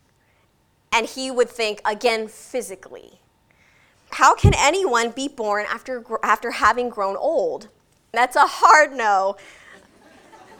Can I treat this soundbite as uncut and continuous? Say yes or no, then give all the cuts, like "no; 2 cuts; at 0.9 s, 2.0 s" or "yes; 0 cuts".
no; 2 cuts; at 4.1 s, 8.1 s